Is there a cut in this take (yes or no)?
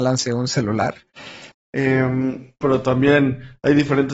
yes